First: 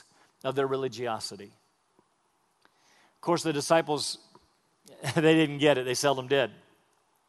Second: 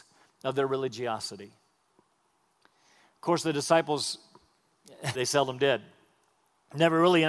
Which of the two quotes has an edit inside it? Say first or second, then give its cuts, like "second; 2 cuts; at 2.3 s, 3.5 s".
second; 1 cut; at 5.1 s